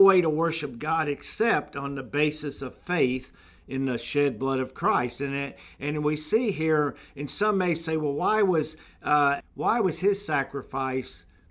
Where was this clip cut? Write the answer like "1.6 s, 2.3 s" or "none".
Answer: 9.4 s